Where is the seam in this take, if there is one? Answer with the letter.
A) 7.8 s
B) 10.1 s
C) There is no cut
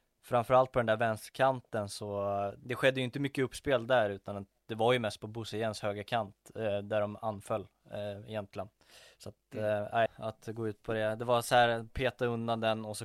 B